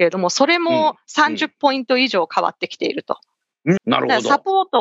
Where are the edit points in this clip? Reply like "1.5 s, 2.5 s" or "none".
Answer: 3.8 s